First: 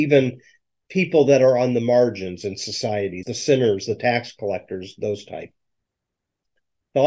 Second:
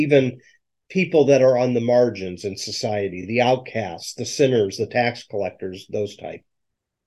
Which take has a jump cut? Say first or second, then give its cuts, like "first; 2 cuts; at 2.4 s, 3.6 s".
first; 1 cut; at 3.2 s